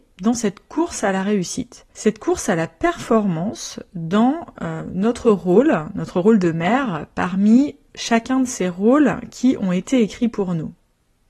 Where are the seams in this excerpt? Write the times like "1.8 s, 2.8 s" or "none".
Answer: 1.9 s